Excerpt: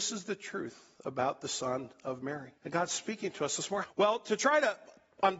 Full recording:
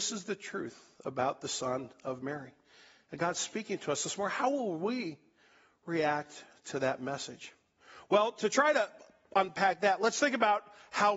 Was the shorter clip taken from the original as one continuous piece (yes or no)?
no